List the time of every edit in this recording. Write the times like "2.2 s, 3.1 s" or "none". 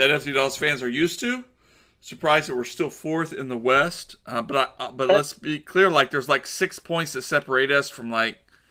none